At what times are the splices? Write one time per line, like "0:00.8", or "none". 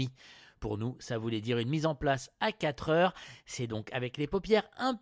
none